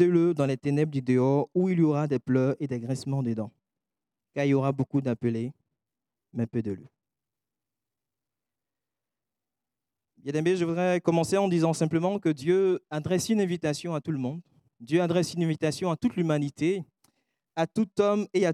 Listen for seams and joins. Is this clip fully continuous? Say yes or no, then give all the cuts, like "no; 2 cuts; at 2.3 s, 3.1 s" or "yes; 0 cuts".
yes; 0 cuts